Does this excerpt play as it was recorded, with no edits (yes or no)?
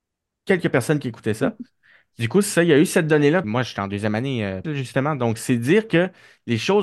no